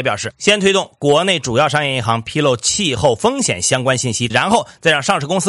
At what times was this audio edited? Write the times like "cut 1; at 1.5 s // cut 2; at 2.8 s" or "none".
cut 1; at 4.3 s